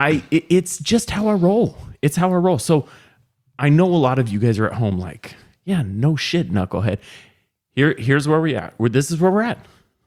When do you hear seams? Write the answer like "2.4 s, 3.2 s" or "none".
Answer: none

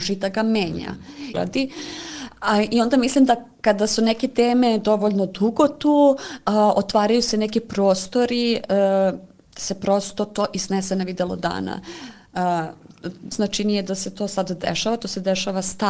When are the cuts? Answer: 1.3 s, 13.3 s

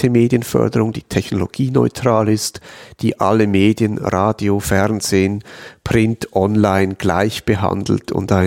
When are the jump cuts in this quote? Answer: none

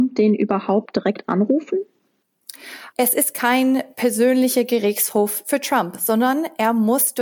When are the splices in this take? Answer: 2.9 s

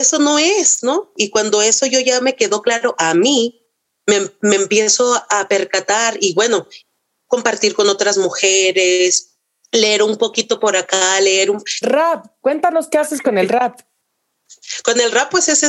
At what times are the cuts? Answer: 11.8 s

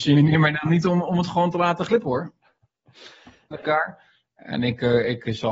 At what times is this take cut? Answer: 3.5 s

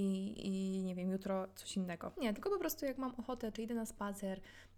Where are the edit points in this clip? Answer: 2.1 s, 3.5 s

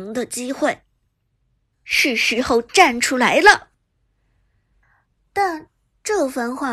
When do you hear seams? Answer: 1.7 s

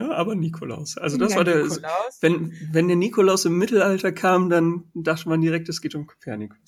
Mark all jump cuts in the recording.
none

